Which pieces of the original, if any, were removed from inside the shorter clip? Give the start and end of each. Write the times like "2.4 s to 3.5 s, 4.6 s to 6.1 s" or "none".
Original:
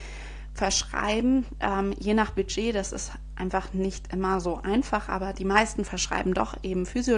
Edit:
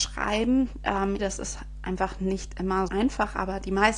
2.0 s to 2.7 s, 4.4 s to 4.6 s